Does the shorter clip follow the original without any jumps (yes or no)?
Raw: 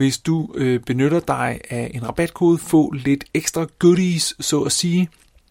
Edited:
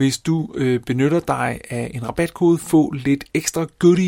yes